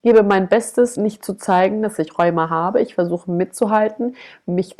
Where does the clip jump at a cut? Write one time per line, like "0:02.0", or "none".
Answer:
none